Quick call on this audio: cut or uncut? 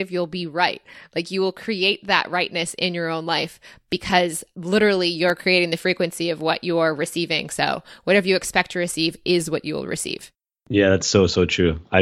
uncut